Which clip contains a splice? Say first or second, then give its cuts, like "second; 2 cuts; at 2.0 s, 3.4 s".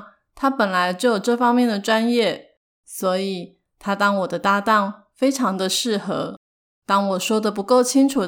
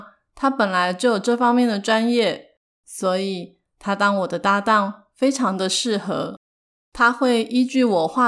first; 1 cut; at 6.7 s